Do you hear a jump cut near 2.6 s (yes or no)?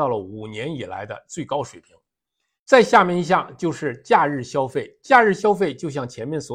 yes